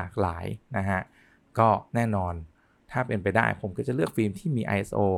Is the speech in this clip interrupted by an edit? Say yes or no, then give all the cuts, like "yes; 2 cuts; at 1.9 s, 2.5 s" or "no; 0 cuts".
yes; 1 cut; at 1.9 s